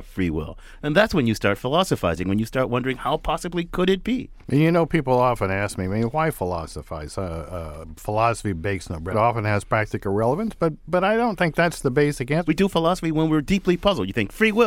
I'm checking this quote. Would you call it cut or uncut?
cut